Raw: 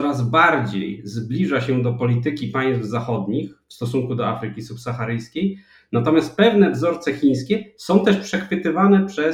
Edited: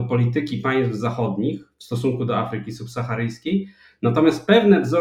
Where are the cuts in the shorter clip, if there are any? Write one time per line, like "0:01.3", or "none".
none